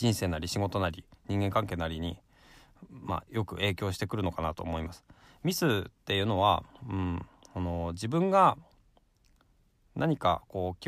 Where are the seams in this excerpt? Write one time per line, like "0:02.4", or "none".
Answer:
none